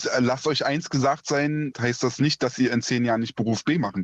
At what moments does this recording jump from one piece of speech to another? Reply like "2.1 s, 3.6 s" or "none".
1.7 s